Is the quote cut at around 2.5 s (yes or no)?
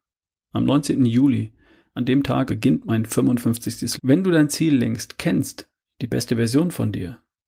yes